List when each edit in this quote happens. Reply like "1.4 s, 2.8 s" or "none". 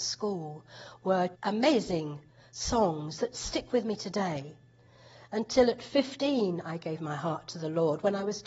1.3 s